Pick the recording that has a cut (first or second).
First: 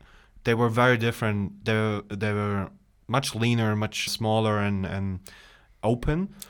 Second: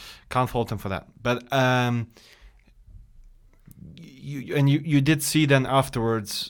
first